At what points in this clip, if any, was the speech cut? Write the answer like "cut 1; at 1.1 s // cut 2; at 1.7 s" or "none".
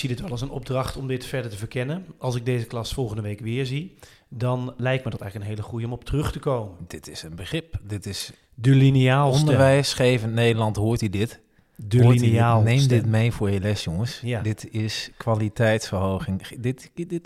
cut 1; at 4.8 s